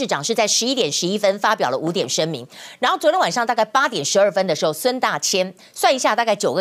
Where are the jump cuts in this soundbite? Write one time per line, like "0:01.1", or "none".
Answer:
none